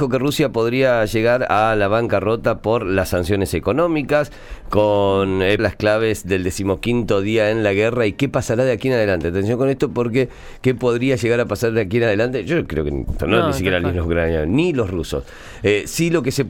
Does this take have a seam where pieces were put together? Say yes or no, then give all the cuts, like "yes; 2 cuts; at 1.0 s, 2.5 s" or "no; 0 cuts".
yes; 2 cuts; at 5.6 s, 13.2 s